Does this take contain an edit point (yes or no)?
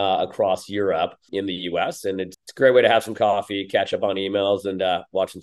yes